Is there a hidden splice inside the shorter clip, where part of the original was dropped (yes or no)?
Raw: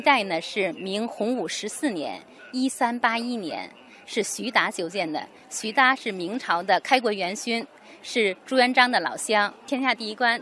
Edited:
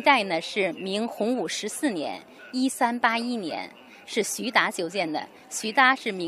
no